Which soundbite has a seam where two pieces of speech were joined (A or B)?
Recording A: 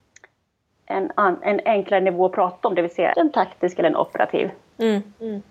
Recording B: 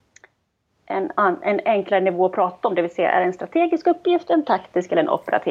A